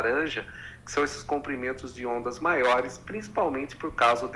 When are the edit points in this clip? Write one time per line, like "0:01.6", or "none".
none